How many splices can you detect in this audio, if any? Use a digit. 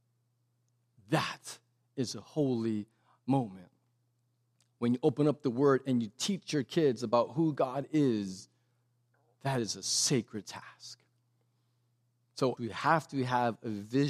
1